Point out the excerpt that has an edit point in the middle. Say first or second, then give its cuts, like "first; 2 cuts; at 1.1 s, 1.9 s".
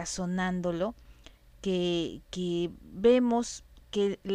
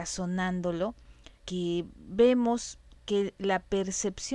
second; 1 cut; at 1.4 s